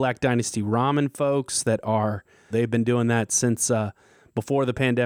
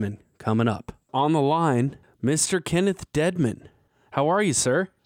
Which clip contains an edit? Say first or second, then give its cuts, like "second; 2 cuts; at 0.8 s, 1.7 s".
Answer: first; 1 cut; at 2.5 s